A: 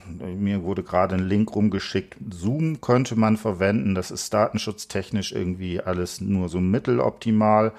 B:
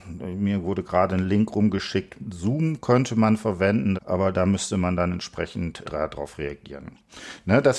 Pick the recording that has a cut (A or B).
B